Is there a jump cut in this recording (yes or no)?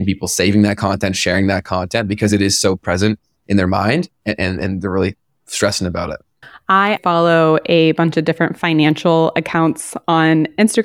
yes